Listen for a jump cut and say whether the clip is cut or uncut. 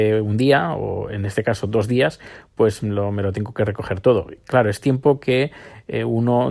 uncut